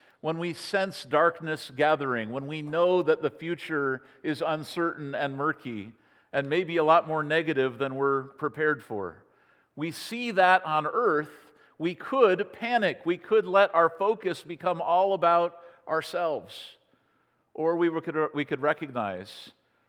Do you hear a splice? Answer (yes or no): no